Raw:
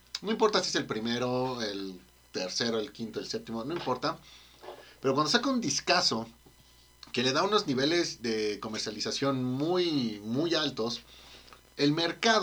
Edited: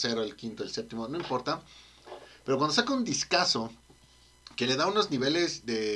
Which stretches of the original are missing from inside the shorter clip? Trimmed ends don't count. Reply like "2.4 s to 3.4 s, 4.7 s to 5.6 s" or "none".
none